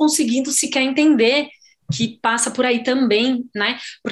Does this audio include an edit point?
no; 0 cuts

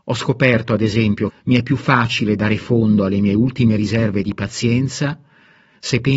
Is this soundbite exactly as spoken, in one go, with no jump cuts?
no; 1 cut; at 1.3 s

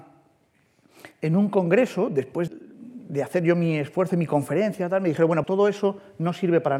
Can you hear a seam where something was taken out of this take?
yes; 2 cuts; at 2.5 s, 5.4 s

